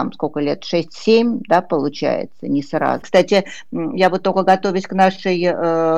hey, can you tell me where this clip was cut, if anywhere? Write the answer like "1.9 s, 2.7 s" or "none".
3.0 s